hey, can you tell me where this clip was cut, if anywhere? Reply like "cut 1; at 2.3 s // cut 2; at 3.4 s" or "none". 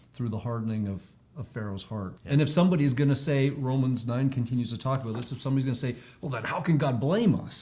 cut 1; at 2.2 s